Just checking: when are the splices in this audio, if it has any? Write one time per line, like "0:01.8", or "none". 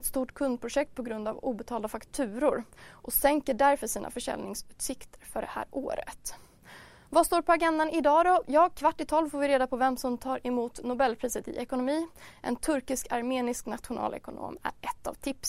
none